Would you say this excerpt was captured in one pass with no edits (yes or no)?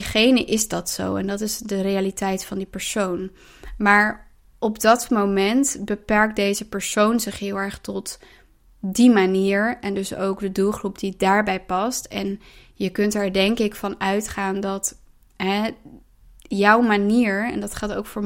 yes